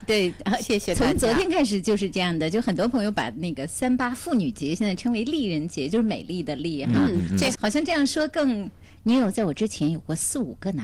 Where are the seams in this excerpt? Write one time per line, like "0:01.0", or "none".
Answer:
0:07.5
0:09.0